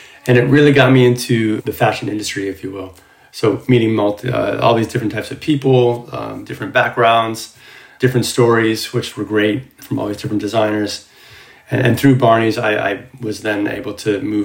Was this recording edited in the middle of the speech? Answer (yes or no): no